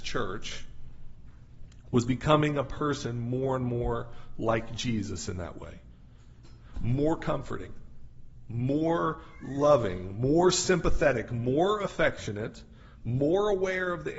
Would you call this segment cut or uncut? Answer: cut